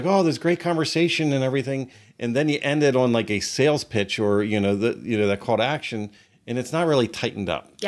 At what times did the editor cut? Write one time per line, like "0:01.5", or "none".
none